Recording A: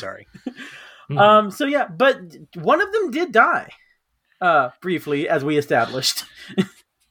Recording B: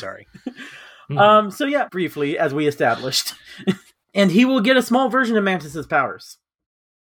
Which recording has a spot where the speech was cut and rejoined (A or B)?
B